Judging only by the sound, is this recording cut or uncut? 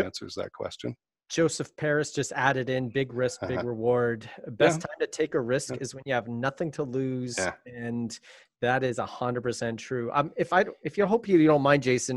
uncut